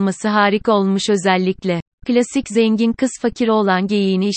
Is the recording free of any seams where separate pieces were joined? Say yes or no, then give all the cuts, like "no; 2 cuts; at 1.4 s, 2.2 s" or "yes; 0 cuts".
no; 1 cut; at 1.9 s